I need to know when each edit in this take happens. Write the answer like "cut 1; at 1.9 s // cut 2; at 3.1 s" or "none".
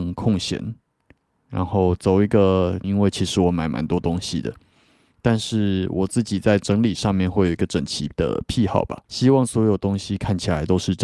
cut 1; at 2.8 s // cut 2; at 9.0 s